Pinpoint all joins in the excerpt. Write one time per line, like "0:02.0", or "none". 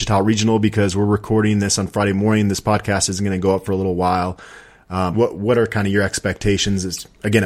0:05.1